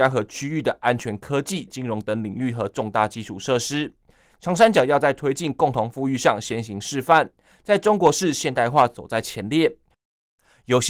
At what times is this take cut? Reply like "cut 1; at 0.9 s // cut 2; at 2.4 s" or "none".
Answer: cut 1; at 1.7 s